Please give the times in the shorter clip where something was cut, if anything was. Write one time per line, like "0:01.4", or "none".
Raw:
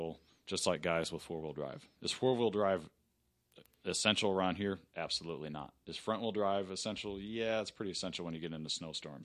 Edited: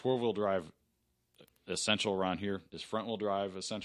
0:02.7